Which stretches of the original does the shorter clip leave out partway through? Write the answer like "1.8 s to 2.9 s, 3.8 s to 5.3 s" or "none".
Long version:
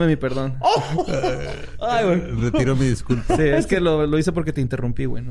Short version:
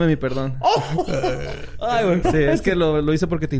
2.2 s to 3.3 s